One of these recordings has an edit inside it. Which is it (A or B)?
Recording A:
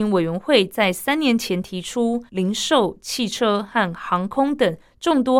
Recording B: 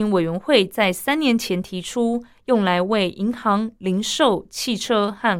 A